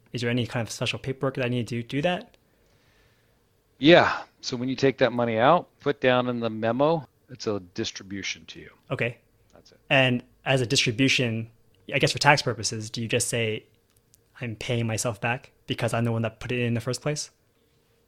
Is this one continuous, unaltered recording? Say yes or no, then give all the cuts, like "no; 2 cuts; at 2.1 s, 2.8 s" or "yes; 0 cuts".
yes; 0 cuts